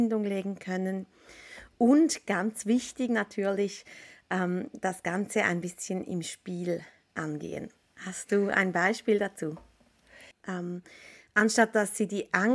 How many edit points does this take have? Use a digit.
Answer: 2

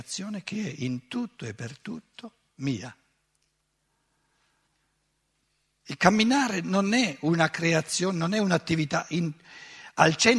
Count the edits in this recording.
0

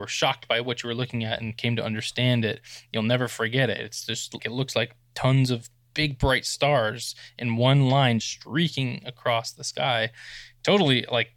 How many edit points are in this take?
2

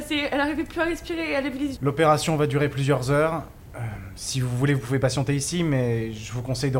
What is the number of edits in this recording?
1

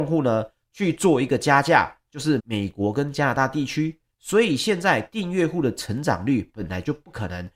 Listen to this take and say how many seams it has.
2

